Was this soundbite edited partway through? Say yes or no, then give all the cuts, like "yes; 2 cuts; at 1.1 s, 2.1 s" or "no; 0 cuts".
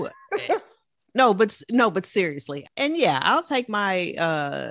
yes; 1 cut; at 2.6 s